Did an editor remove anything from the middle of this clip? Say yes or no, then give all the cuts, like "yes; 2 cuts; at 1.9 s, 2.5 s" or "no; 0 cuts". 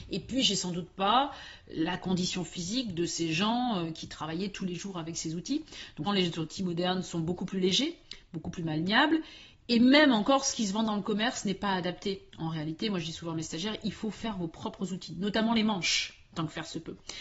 yes; 1 cut; at 6.1 s